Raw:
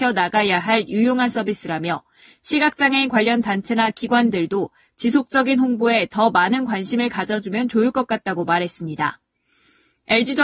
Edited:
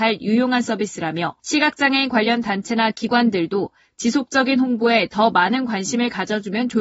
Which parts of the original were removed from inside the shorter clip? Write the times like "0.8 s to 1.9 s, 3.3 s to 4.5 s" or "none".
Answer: 2.1 s to 2.4 s